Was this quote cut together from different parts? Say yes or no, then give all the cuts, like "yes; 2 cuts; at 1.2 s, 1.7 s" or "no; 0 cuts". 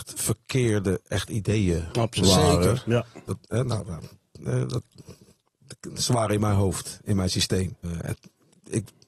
yes; 2 cuts; at 3.3 s, 7.8 s